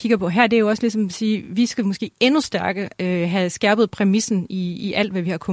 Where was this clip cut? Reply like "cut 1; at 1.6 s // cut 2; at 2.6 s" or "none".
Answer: none